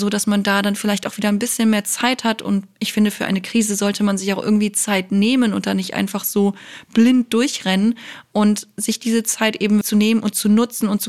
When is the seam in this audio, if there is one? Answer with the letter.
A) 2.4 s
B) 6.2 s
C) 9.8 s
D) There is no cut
C